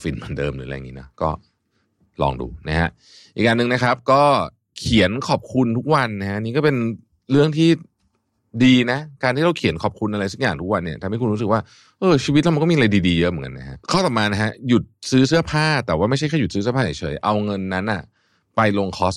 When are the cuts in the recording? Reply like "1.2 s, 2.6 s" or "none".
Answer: 13.8 s